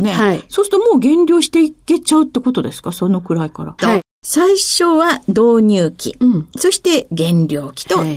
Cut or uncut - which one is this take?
cut